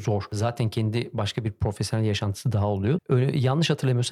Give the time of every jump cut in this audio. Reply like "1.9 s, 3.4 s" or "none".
3.0 s

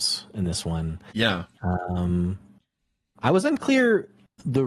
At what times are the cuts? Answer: none

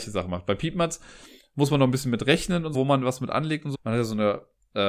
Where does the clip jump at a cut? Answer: 2.7 s, 3.7 s

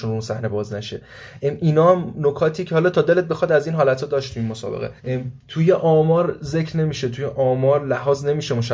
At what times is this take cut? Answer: 5.0 s

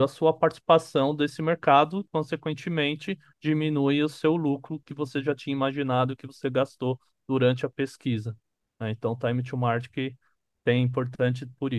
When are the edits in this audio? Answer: none

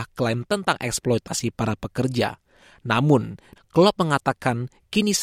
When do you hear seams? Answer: 3.6 s

